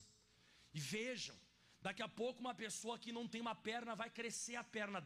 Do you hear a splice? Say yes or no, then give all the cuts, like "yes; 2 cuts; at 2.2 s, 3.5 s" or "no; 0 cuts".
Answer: no; 0 cuts